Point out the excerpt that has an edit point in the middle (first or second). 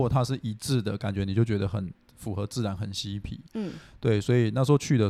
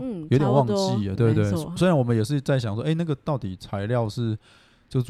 second